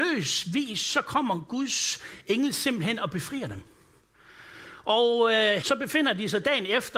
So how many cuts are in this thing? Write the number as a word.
one